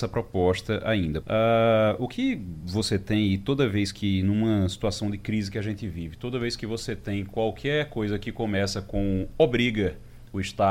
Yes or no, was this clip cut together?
yes